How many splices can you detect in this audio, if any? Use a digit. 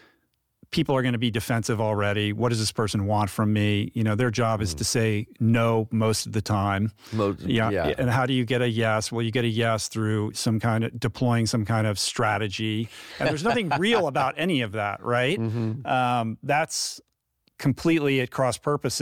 0